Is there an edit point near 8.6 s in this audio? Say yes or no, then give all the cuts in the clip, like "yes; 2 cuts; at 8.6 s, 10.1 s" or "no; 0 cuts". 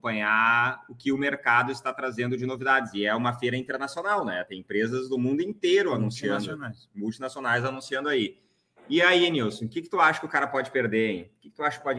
no; 0 cuts